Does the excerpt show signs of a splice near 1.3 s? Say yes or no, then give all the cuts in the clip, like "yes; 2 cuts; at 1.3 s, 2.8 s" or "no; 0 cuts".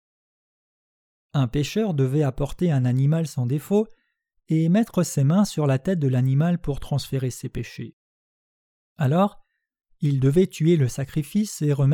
yes; 1 cut; at 1.3 s